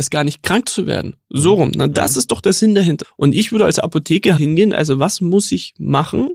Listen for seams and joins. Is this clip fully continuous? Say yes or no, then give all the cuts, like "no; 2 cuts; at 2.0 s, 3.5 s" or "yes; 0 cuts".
no; 2 cuts; at 3.0 s, 4.4 s